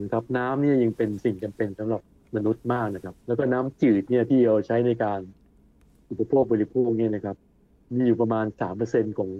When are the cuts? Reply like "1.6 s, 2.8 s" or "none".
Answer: 3.2 s